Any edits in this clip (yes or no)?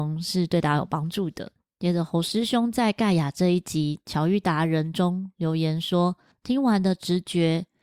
no